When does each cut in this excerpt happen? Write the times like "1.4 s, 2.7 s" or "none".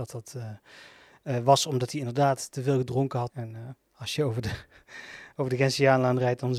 3.3 s